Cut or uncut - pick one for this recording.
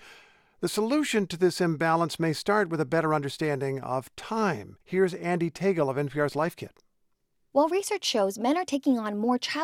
cut